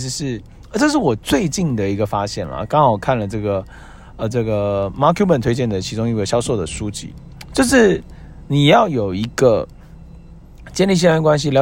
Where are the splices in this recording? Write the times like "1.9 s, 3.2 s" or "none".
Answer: none